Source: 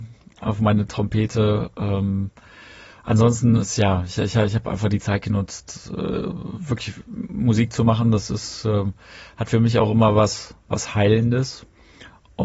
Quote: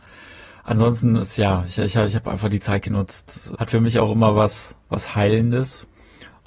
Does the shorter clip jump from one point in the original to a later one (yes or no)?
yes